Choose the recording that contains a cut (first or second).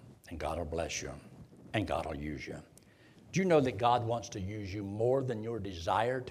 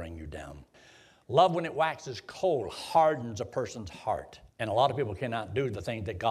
second